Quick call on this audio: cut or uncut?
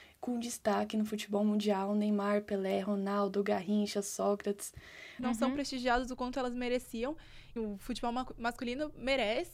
cut